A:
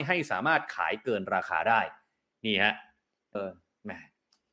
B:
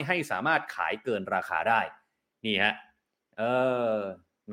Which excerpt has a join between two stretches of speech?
A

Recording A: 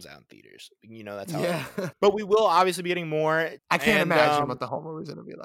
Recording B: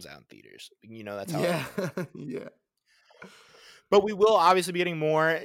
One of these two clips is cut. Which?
A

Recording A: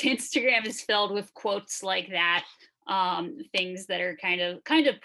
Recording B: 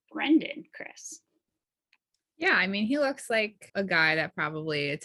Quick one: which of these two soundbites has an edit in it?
B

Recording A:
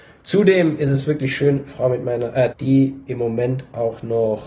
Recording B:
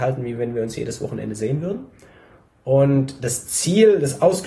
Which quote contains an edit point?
A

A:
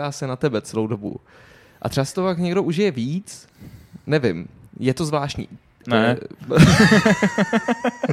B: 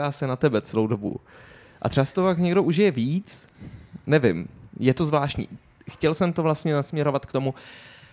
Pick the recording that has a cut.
A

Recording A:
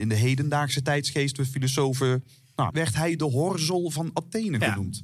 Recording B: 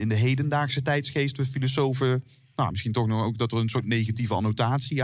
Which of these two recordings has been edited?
A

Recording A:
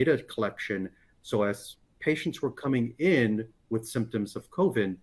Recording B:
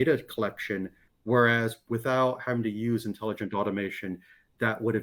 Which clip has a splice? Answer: B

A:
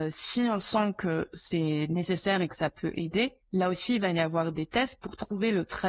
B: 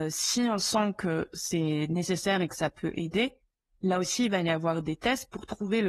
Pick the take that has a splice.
A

